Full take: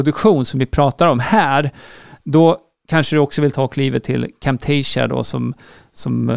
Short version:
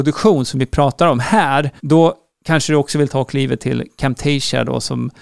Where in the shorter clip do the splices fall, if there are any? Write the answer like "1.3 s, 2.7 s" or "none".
1.8 s